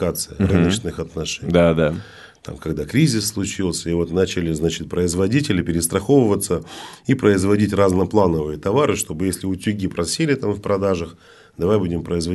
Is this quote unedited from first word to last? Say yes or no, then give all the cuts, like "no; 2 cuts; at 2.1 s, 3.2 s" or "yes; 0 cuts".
yes; 0 cuts